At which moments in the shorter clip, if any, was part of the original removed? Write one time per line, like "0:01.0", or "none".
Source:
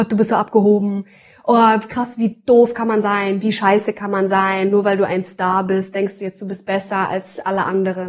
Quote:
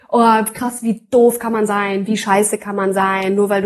none